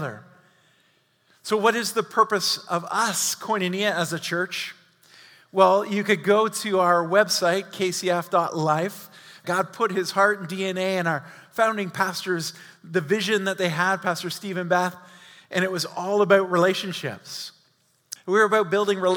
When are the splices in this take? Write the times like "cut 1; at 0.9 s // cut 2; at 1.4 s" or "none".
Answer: cut 1; at 9.4 s // cut 2; at 18.2 s